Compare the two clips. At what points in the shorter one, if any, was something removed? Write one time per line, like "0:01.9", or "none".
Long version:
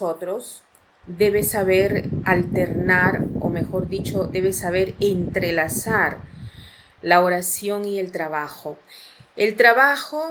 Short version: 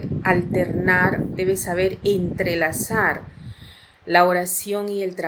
0:01.3